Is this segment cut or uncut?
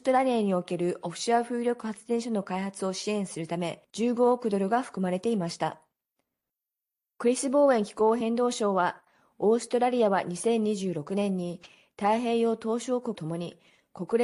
cut